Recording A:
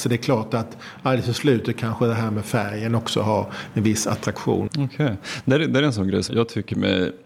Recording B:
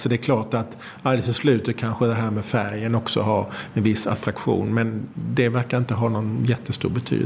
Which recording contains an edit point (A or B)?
A